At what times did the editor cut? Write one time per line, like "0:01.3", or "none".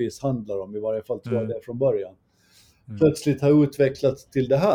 none